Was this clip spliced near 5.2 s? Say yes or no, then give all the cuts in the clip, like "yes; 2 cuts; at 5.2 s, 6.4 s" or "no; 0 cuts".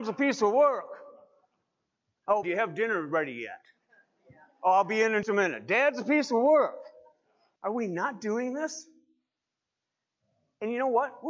yes; 3 cuts; at 2.4 s, 5.2 s, 7.6 s